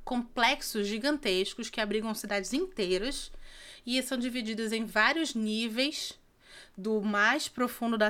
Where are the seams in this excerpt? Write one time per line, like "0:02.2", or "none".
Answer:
none